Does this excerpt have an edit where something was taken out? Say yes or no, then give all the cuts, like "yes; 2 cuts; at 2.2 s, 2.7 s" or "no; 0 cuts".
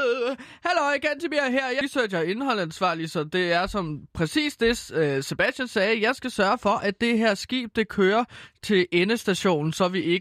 yes; 1 cut; at 1.8 s